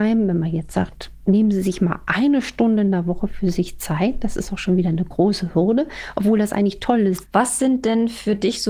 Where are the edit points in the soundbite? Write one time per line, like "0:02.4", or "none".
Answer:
0:07.2